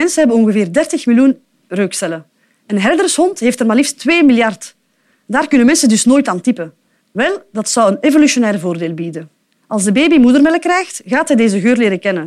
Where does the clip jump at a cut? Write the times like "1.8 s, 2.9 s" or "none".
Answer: 7.0 s, 9.6 s